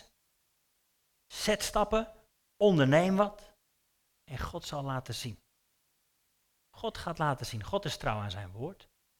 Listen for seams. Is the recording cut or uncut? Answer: uncut